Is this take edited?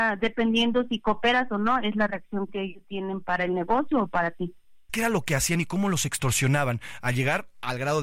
yes; 1 cut; at 4.9 s

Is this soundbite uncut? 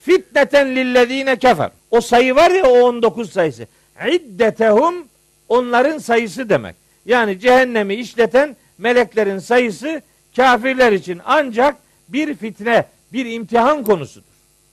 no; 1 cut; at 1.8 s

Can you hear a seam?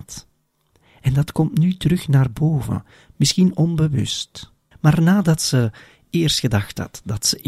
yes; 1 cut; at 4.7 s

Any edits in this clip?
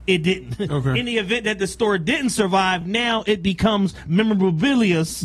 no; 0 cuts

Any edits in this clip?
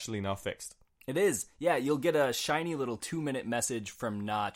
no; 0 cuts

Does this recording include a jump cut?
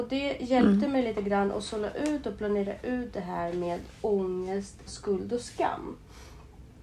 yes; 1 cut; at 4.9 s

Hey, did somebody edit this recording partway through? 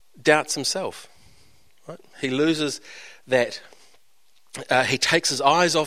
no; 0 cuts

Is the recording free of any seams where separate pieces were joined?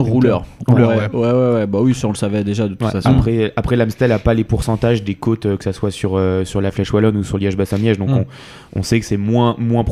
yes; 0 cuts

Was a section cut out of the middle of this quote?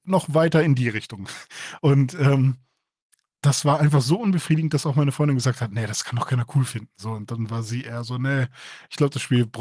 no; 0 cuts

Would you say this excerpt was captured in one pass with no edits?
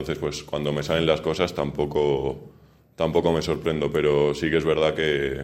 yes; 0 cuts

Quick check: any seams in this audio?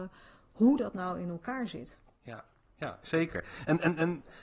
no; 0 cuts

